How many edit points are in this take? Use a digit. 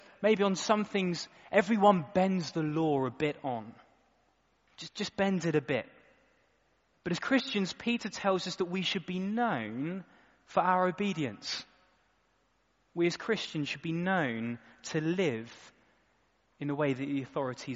0